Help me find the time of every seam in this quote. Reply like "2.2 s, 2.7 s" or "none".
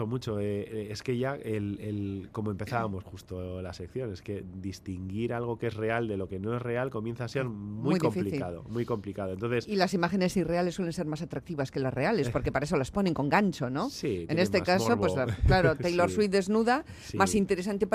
none